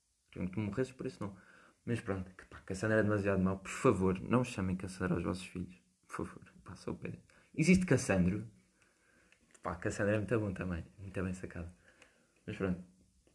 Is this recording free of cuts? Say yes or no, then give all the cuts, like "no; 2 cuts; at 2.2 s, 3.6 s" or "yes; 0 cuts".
yes; 0 cuts